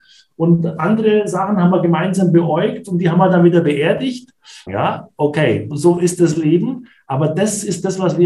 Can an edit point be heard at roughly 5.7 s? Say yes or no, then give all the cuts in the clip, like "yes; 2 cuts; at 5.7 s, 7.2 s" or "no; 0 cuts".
yes; 2 cuts; at 4.7 s, 5.7 s